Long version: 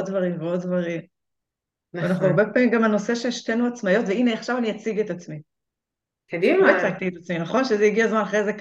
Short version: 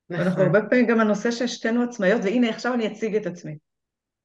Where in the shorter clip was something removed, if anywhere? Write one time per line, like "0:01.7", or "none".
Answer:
none